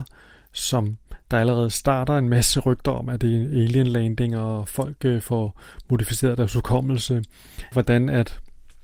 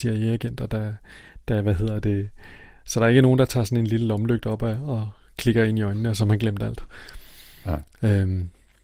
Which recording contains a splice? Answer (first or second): first